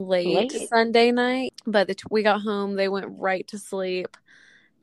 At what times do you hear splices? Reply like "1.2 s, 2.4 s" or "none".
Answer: 1.5 s